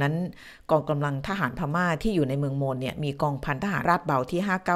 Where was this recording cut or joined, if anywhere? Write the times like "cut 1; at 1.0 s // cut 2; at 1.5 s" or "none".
cut 1; at 3.8 s

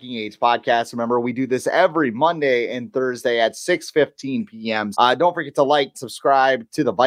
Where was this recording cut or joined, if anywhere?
cut 1; at 4.9 s // cut 2; at 5.9 s

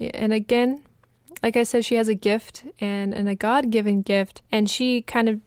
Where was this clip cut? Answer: cut 1; at 4.5 s

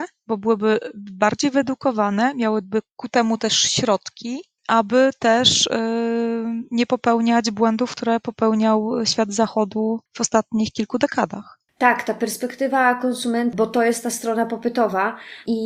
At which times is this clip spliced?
cut 1; at 10.1 s // cut 2; at 13.5 s

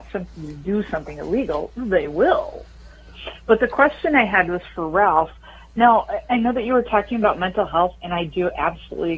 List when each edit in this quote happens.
none

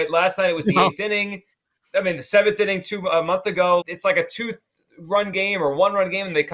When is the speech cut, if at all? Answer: cut 1; at 3.8 s

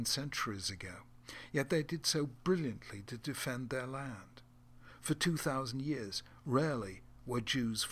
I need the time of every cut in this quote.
none

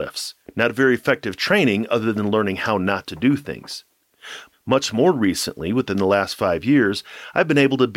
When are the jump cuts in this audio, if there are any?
cut 1; at 4.5 s

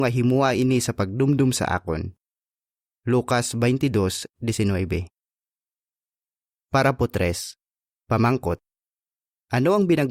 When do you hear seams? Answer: none

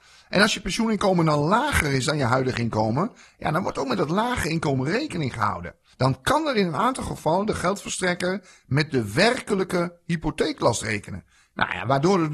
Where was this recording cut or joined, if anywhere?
cut 1; at 5.9 s

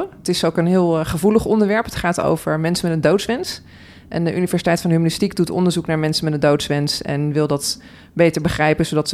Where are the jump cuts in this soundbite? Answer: none

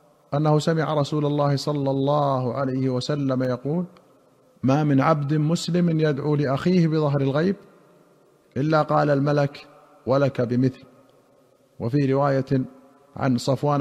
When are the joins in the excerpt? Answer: none

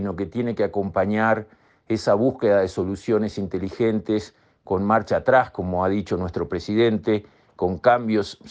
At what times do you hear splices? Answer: none

